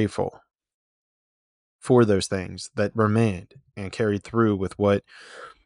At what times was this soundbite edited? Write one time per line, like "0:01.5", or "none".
none